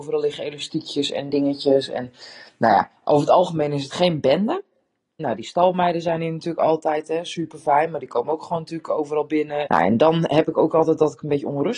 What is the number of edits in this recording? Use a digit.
2